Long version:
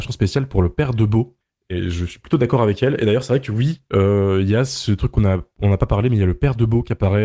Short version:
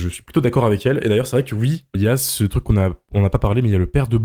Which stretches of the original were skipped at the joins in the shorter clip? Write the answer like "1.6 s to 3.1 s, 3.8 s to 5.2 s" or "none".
3.9 s to 4.4 s